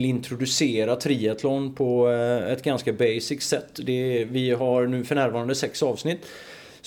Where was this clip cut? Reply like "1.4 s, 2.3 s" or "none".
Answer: none